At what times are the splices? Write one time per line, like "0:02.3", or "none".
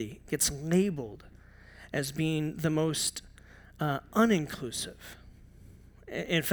none